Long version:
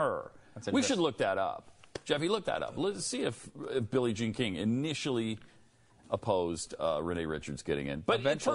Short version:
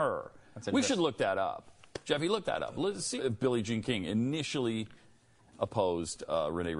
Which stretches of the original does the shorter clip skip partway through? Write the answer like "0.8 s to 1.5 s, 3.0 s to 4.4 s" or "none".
3.2 s to 3.7 s